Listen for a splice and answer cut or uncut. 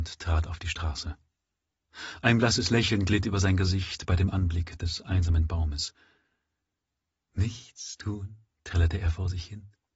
uncut